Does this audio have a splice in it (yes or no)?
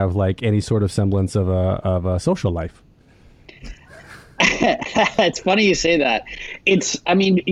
no